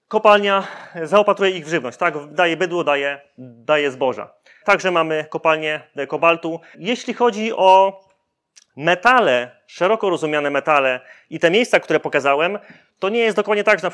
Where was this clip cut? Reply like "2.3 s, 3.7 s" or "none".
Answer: 4.6 s, 6.7 s